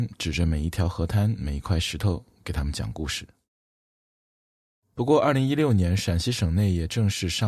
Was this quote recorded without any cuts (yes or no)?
yes